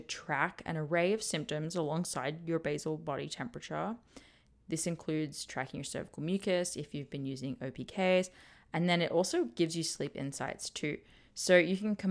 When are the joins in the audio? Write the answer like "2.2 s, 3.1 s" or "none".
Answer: none